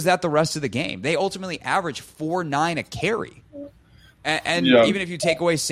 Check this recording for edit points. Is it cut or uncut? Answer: uncut